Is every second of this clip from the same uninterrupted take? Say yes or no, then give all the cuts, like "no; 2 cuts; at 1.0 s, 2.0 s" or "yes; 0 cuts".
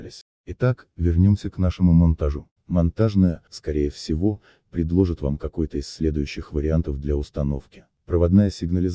no; 1 cut; at 3.5 s